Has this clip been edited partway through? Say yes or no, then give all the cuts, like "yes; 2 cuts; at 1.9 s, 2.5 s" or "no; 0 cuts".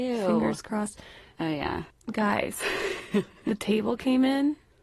yes; 1 cut; at 1.4 s